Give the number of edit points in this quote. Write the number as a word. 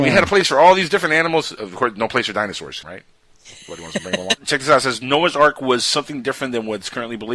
two